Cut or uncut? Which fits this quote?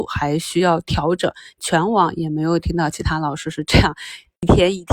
cut